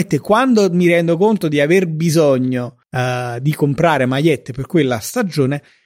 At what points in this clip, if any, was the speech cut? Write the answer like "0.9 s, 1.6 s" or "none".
2.8 s